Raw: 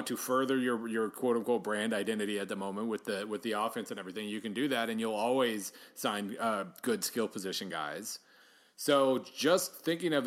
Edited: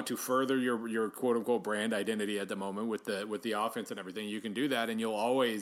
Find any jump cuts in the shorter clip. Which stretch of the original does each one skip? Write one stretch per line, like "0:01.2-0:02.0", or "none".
none